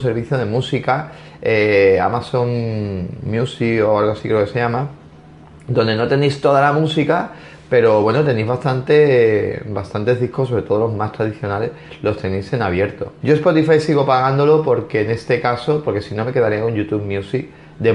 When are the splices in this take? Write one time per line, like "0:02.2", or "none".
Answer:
0:13.2